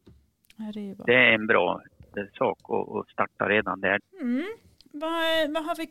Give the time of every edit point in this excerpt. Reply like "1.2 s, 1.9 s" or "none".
4.0 s